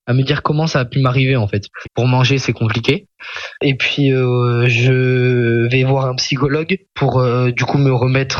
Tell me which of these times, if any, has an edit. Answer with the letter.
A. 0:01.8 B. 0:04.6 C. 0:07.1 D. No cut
A